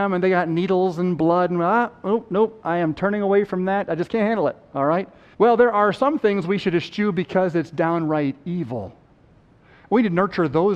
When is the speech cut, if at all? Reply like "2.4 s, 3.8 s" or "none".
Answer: 5.3 s